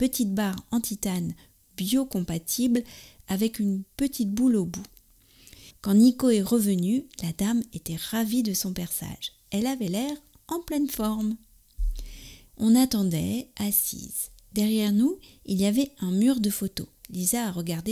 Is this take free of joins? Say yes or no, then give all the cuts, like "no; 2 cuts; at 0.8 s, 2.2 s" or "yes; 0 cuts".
no; 2 cuts; at 5.7 s, 12.5 s